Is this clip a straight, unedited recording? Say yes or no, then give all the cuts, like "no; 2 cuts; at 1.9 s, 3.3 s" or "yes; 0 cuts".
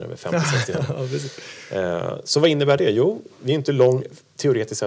yes; 0 cuts